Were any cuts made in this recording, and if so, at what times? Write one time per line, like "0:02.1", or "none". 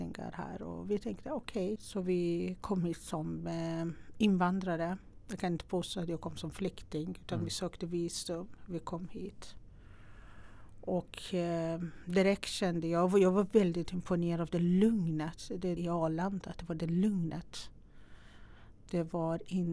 0:01.8
0:15.8